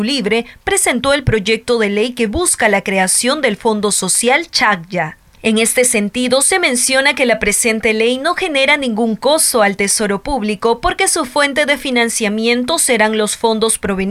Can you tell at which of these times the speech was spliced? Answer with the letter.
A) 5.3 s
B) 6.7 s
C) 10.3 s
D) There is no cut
A